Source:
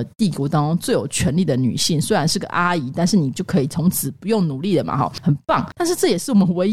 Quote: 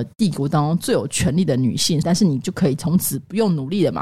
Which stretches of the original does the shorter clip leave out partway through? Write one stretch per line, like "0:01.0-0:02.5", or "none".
0:02.0-0:02.9